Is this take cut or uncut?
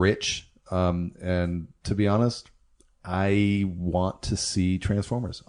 uncut